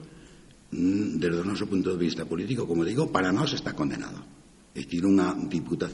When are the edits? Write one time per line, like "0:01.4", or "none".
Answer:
0:04.6